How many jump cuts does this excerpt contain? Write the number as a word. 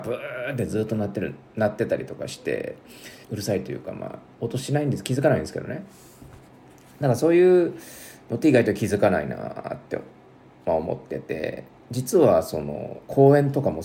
one